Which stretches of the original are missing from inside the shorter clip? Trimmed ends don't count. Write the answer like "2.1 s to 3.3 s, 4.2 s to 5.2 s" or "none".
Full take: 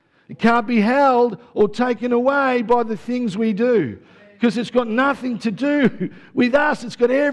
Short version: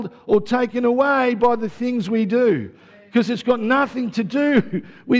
none